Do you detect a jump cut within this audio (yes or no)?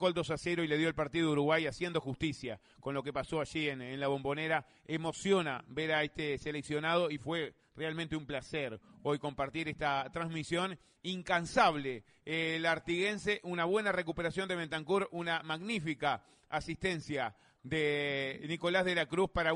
yes